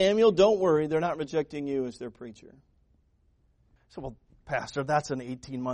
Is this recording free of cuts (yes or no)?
no